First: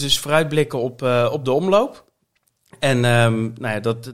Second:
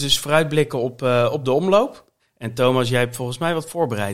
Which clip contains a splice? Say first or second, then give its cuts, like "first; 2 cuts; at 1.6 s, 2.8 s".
second; 1 cut; at 2.2 s